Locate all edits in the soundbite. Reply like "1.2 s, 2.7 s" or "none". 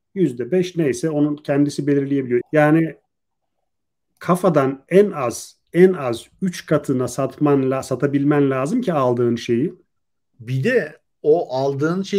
2.4 s, 10.3 s